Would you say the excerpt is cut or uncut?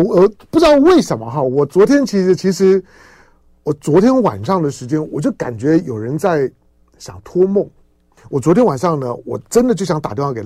cut